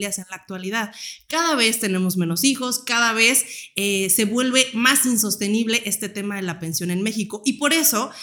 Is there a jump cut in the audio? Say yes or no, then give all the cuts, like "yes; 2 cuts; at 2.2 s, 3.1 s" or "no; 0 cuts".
no; 0 cuts